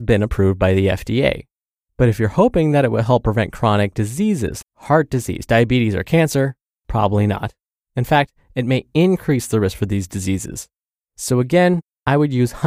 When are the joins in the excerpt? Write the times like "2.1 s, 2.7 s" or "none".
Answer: 4.6 s